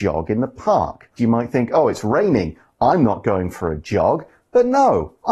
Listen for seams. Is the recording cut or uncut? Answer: cut